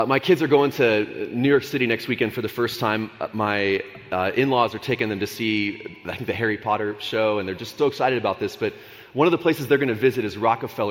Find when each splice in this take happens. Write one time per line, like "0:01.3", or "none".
0:07.8